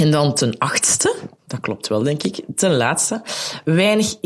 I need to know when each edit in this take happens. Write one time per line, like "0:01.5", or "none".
none